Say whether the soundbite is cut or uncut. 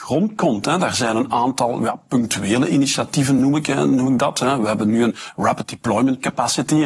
uncut